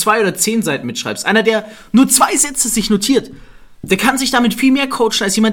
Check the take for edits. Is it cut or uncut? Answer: uncut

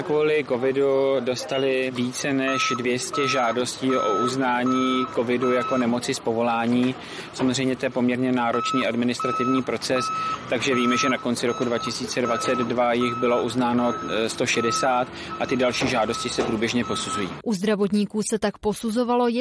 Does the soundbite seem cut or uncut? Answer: cut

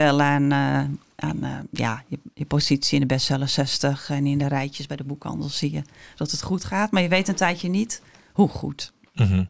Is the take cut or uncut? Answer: uncut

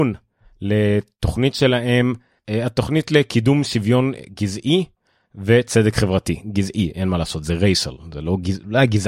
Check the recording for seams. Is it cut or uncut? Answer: uncut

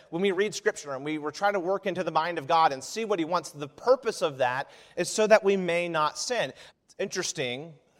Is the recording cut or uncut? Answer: cut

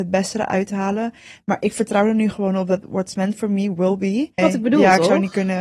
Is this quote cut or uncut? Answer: cut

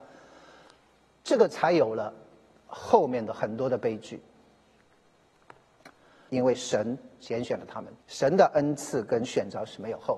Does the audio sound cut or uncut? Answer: cut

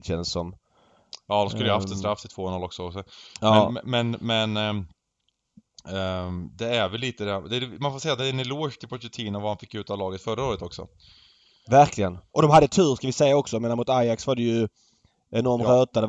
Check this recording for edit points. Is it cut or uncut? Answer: uncut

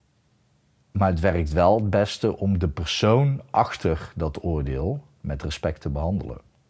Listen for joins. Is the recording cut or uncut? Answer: uncut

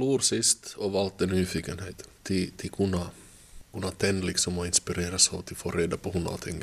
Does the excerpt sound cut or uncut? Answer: cut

